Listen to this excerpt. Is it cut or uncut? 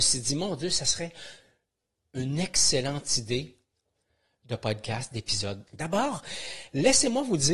cut